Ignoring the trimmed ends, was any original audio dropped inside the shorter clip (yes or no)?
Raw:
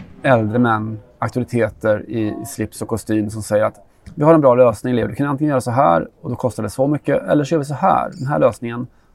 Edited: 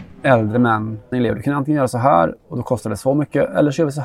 yes